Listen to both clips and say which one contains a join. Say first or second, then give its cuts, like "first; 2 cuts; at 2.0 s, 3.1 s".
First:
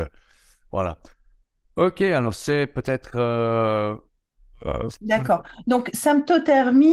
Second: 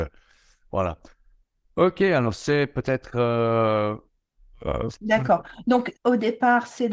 second; 1 cut; at 5.9 s